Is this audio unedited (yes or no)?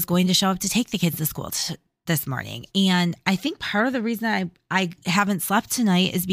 no